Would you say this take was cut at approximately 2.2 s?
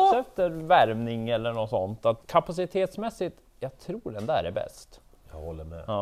yes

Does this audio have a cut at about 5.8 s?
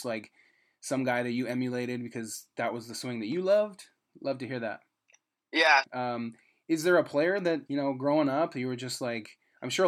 yes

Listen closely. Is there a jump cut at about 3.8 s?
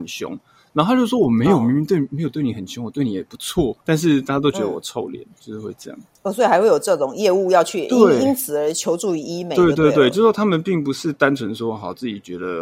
yes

